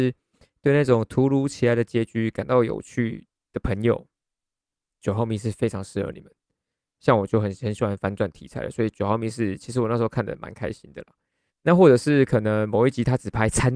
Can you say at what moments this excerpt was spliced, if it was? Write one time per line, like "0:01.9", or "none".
0:11.5